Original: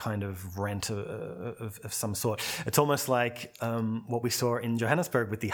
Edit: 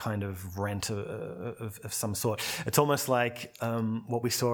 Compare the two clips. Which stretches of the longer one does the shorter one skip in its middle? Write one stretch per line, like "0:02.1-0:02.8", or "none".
none